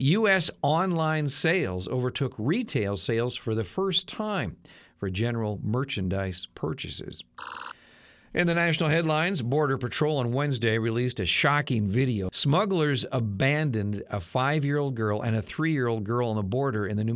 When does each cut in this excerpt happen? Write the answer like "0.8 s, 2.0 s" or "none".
12.3 s